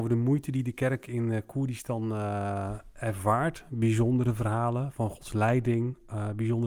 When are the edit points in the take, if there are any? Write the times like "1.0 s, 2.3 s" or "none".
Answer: none

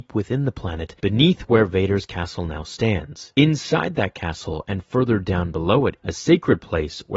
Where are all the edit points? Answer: 6.0 s

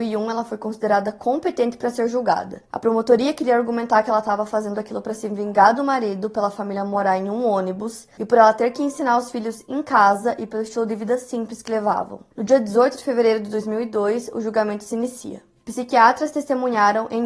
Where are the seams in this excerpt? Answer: none

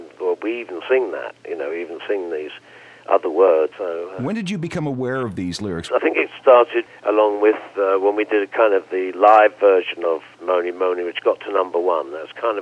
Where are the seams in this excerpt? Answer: 3.7 s, 5.9 s

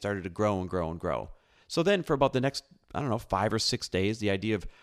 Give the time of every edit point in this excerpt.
none

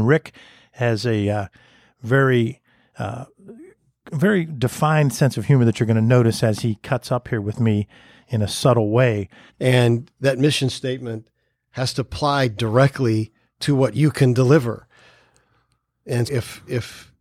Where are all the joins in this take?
9.5 s, 16.3 s

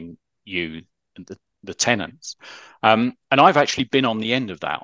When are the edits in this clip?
none

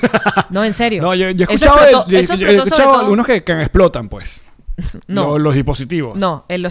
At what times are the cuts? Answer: none

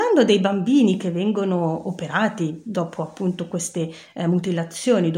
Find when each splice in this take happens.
none

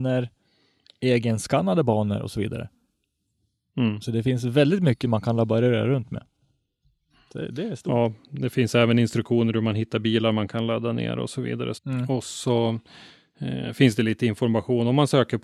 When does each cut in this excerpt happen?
11.7 s

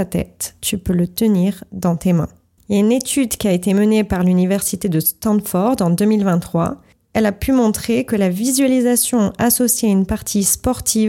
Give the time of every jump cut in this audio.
2.6 s

